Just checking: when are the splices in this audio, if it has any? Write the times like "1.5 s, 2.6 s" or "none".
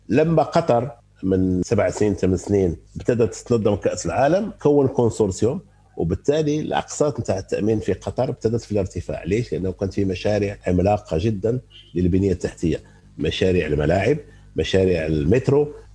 2.9 s